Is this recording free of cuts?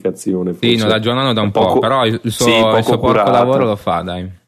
yes; 0 cuts

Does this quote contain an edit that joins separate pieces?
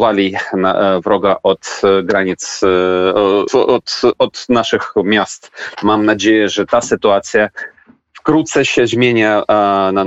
yes; 2 cuts; at 3.5 s, 5.8 s

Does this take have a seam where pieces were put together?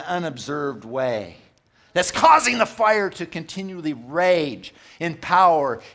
no; 0 cuts

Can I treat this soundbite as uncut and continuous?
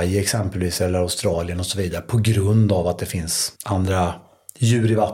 no; 1 cut; at 3.6 s

